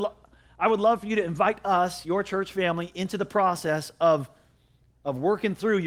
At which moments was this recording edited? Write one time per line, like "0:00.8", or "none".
none